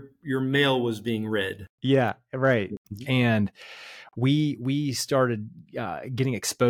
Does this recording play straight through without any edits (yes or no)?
no